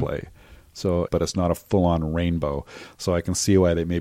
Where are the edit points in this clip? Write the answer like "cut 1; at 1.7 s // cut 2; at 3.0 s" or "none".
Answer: cut 1; at 1.1 s